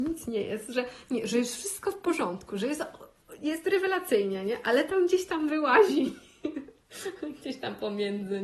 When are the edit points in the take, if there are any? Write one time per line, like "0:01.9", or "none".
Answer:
none